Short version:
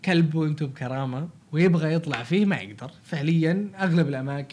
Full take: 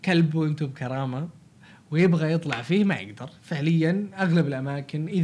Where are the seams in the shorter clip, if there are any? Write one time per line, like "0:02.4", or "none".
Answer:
0:01.4